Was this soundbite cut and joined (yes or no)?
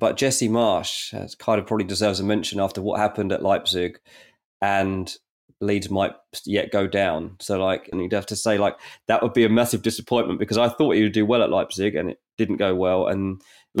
yes